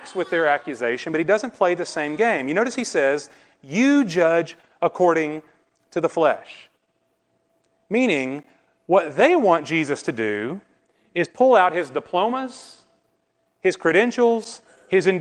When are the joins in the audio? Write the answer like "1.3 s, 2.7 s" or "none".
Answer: none